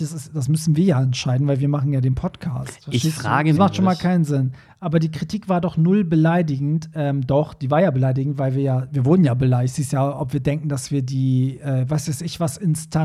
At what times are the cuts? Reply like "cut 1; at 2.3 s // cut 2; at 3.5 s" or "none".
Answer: cut 1; at 3.6 s